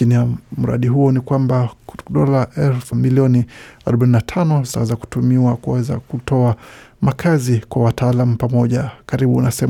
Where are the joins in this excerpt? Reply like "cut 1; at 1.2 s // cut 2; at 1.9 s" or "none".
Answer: cut 1; at 2.9 s